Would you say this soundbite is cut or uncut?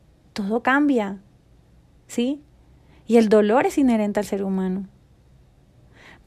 uncut